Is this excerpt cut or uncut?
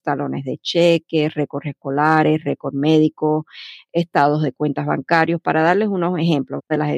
uncut